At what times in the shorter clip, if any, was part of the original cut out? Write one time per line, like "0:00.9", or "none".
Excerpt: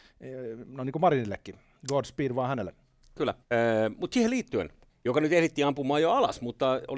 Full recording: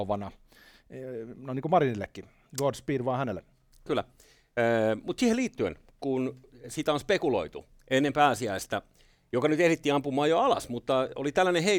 0:03.4
0:04.9